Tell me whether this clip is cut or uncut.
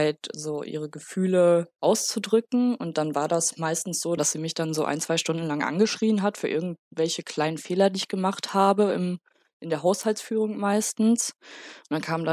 cut